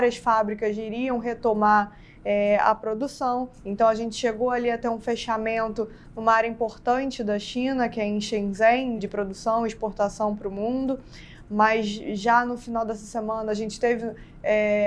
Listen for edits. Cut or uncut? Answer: cut